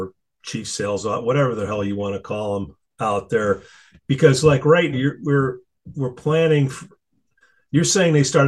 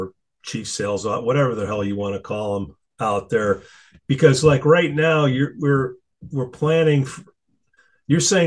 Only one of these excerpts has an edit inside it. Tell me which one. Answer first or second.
first